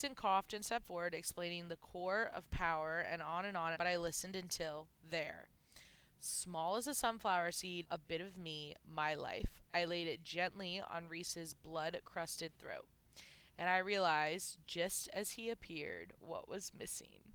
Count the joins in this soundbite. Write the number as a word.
two